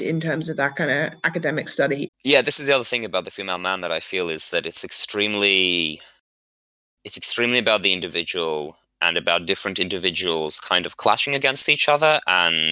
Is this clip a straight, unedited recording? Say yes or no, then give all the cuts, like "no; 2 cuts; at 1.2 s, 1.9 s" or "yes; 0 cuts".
no; 1 cut; at 2.1 s